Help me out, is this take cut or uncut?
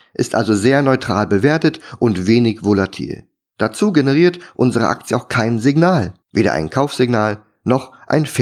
cut